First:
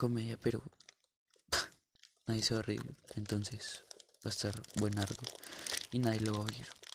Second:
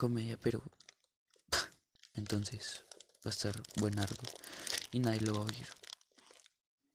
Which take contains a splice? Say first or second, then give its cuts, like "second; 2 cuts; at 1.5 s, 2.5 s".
second; 1 cut; at 2.1 s